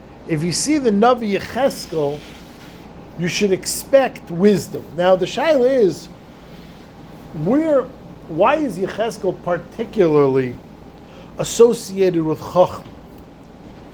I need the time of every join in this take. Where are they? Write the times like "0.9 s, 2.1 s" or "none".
none